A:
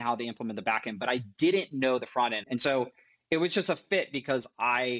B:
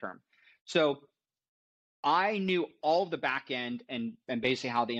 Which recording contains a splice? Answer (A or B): A